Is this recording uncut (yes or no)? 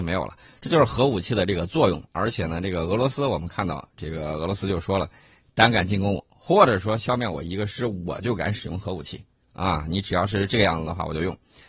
yes